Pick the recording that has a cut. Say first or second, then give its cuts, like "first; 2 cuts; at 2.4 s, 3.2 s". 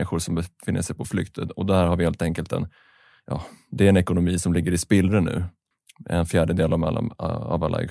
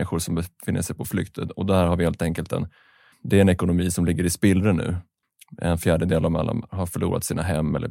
second; 2 cuts; at 3.1 s, 6.7 s